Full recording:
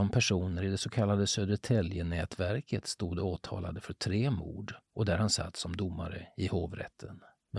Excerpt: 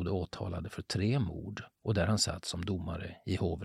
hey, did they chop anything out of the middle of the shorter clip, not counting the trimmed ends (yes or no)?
no